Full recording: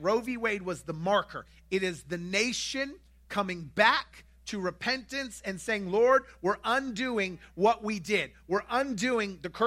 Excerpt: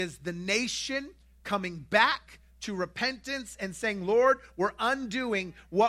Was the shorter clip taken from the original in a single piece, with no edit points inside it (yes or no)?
yes